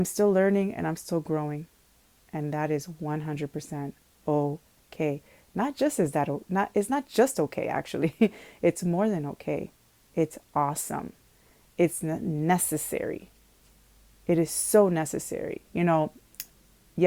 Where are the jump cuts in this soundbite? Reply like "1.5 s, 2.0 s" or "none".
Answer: 15.7 s